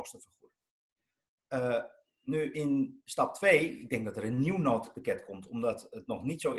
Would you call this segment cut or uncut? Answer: uncut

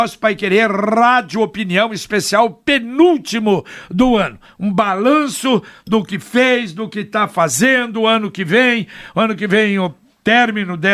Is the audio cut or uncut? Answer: uncut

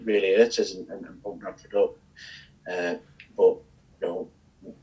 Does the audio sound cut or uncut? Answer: uncut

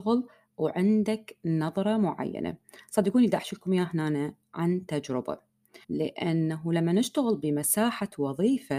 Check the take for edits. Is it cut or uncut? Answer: cut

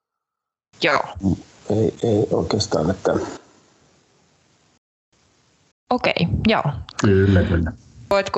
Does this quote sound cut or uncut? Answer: cut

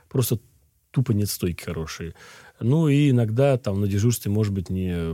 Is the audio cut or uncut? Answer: uncut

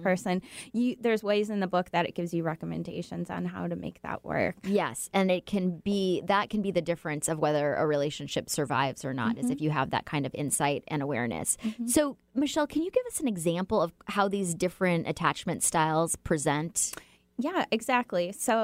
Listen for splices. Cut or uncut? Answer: uncut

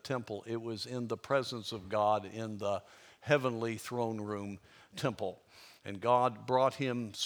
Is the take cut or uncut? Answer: uncut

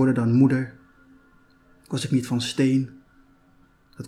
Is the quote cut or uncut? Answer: uncut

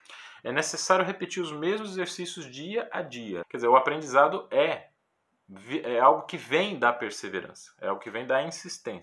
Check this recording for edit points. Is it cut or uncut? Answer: cut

